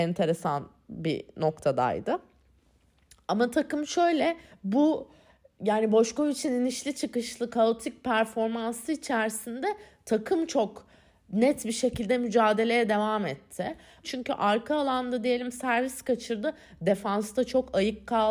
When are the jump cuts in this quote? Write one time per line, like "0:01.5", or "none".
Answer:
0:14.0